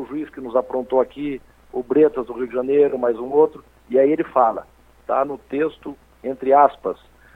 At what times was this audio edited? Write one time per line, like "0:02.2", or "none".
none